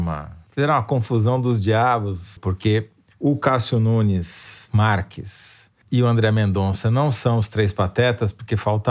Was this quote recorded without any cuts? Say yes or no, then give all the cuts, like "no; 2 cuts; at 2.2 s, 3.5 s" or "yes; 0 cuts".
no; 1 cut; at 2.4 s